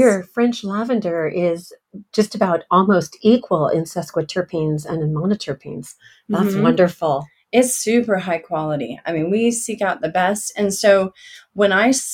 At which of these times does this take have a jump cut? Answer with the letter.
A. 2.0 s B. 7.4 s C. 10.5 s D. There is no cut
D